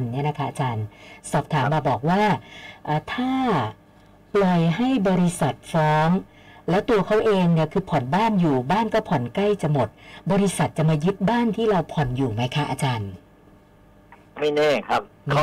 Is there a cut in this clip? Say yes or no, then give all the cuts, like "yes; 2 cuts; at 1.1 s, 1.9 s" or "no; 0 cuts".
no; 0 cuts